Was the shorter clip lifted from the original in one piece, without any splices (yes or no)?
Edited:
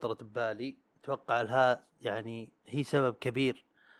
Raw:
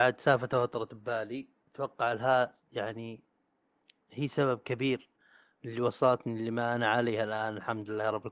no